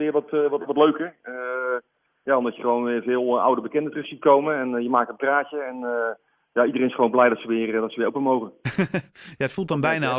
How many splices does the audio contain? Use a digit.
0